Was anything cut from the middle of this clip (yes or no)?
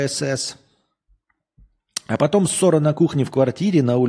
no